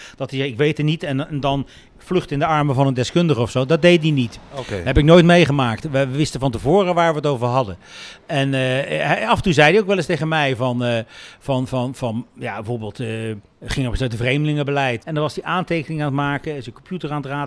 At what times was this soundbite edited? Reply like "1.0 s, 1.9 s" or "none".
13.5 s, 15.0 s